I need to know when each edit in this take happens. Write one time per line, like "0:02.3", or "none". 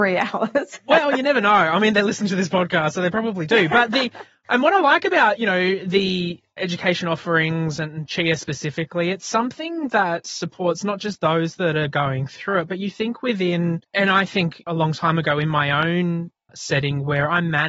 0:13.8